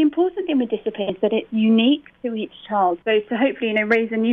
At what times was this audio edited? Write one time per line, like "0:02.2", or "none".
0:01.1
0:03.0